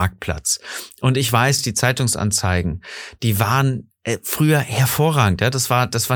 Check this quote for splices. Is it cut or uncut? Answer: uncut